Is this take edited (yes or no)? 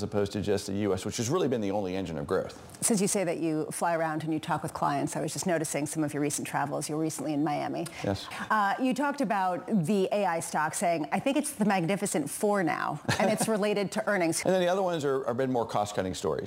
yes